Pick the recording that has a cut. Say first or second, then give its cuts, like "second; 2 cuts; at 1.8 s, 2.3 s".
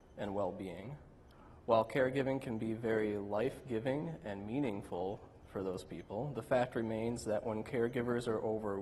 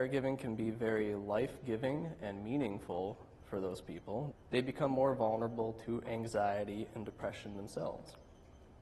second; 1 cut; at 4.3 s